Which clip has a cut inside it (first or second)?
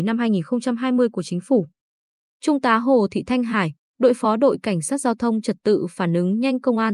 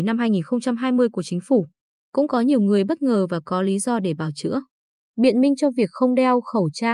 second